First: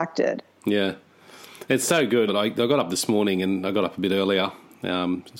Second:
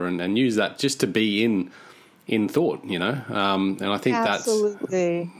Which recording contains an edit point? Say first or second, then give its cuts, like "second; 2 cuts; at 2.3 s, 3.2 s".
first; 1 cut; at 2.3 s